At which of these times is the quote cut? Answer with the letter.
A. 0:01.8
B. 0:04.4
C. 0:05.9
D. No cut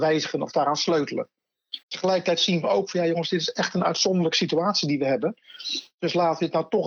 A